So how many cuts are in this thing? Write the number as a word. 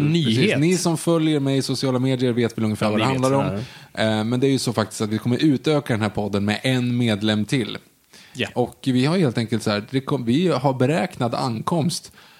one